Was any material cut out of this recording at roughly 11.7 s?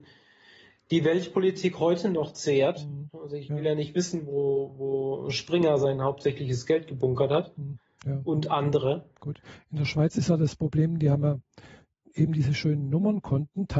no; 0 cuts

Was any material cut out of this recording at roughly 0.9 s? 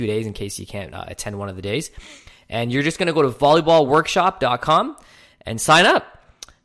no; 0 cuts

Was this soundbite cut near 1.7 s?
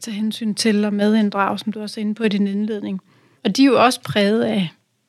no; 1 cut; at 3.3 s

